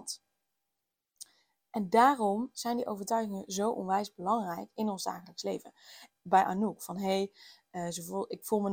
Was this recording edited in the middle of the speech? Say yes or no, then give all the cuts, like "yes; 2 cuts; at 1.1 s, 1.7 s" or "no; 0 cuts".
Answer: yes; 1 cut; at 6.1 s